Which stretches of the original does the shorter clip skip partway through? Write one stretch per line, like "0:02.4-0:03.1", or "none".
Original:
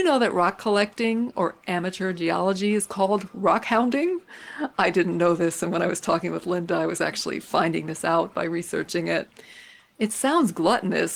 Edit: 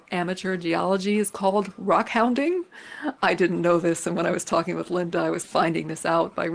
0:07.0-0:07.4

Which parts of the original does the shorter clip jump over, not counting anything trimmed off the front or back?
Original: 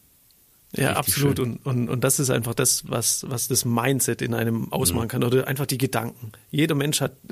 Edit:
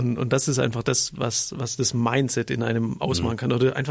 none

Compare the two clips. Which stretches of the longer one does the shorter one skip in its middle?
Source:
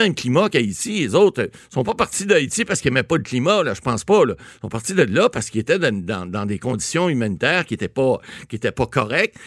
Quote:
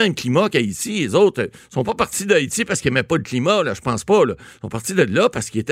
none

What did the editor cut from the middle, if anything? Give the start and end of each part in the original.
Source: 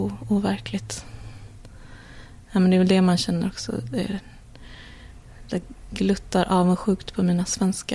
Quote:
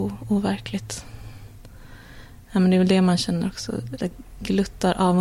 0:03.9-0:05.4

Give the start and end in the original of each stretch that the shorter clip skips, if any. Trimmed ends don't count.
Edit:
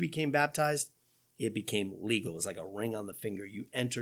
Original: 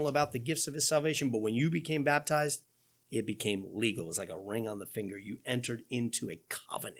none

